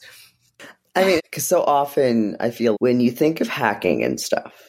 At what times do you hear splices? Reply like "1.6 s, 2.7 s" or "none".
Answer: 1.2 s, 2.7 s